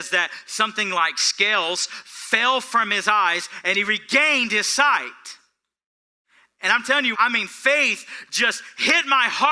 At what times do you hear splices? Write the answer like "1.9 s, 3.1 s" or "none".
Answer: 7.1 s